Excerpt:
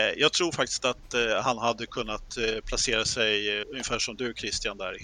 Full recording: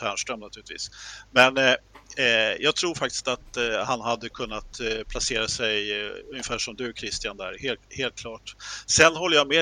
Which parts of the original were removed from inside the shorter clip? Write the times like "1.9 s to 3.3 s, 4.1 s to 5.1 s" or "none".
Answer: 6.1 s to 6.2 s